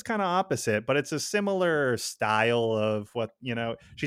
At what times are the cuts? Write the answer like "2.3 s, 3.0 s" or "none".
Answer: none